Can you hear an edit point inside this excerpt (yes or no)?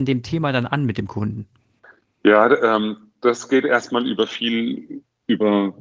no